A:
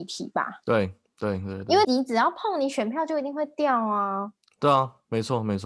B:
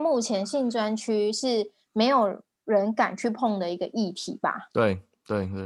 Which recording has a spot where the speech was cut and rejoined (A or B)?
A